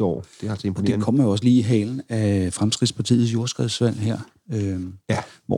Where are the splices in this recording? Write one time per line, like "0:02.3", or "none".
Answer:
none